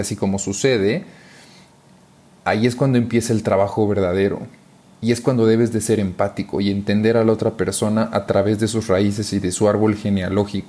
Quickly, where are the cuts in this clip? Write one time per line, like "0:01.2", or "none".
none